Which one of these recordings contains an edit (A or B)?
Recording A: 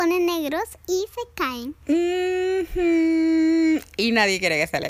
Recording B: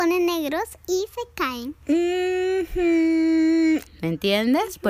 B